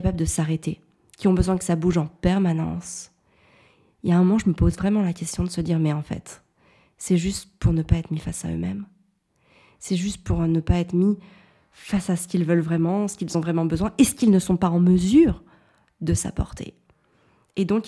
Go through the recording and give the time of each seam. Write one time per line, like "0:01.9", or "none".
none